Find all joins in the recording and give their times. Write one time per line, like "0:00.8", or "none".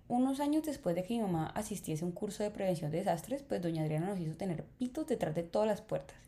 none